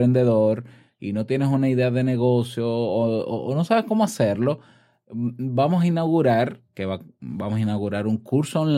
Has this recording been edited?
no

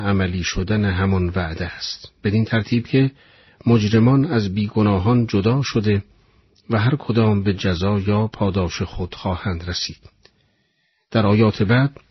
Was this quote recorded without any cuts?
yes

